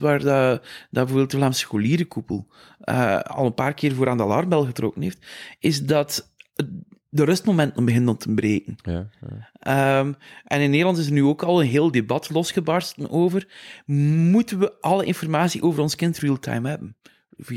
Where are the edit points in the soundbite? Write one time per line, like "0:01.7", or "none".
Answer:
none

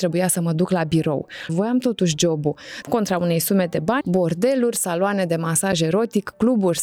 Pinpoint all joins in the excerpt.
0:01.5
0:02.8
0:04.0

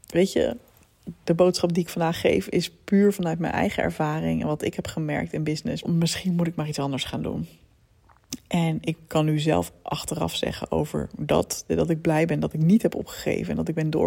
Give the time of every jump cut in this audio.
0:05.8
0:11.7

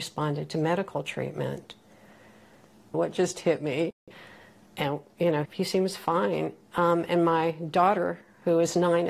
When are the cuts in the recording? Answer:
0:02.9
0:05.4

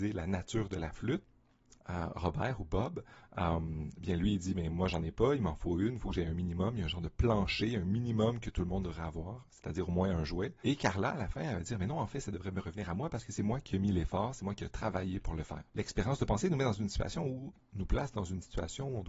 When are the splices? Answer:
0:01.8
0:15.7

